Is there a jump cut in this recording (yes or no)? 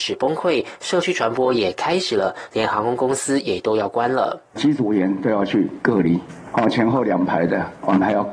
no